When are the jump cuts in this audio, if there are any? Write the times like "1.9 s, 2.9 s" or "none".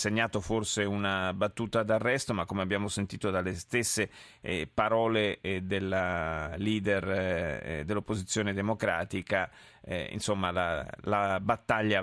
none